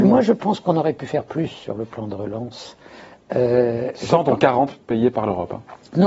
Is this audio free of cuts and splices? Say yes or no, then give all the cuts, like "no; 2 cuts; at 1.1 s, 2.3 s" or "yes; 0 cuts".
yes; 0 cuts